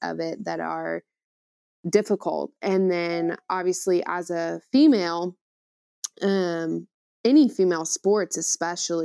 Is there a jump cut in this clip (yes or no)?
no